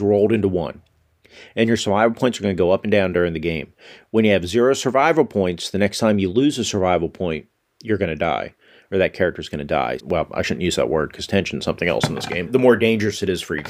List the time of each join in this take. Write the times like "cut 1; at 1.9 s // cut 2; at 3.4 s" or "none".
cut 1; at 10.0 s // cut 2; at 12.5 s